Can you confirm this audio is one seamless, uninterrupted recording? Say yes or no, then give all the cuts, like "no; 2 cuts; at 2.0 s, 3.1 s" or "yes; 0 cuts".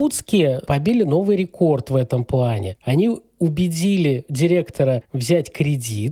no; 1 cut; at 2.8 s